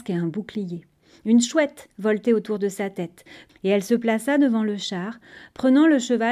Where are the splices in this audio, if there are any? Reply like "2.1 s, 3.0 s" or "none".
3.5 s